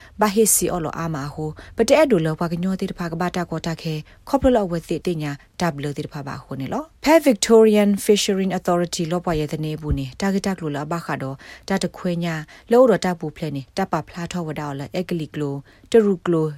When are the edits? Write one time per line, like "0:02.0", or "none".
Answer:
0:05.0
0:07.0